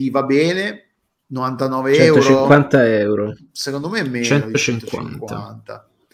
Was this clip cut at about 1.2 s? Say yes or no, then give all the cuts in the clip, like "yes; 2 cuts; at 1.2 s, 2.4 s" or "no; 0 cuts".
yes; 1 cut; at 1.2 s